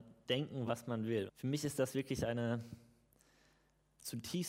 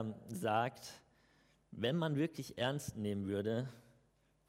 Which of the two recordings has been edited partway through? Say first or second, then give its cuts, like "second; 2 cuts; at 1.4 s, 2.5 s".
first; 1 cut; at 1.3 s